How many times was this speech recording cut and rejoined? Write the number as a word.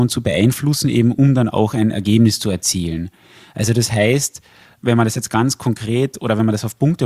zero